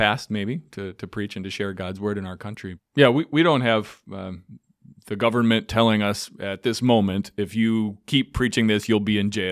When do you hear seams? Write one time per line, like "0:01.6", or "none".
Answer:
0:02.8